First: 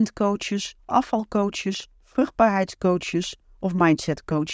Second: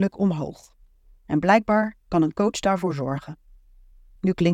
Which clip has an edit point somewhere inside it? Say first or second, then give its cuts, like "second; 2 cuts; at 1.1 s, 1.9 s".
first; 1 cut; at 2.0 s